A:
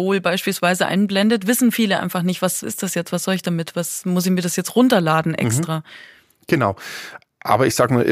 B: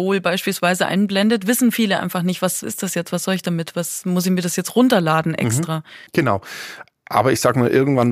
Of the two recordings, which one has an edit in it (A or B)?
B